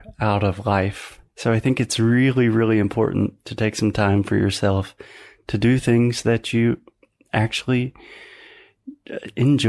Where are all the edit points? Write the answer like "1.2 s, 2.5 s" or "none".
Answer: 1.3 s